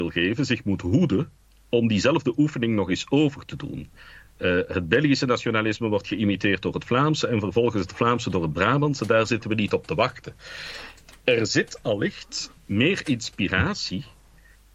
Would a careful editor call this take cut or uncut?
uncut